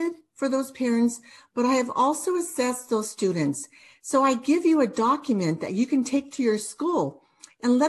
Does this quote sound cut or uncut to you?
uncut